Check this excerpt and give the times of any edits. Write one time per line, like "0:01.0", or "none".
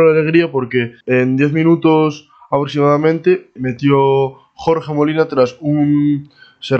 0:01.0
0:03.6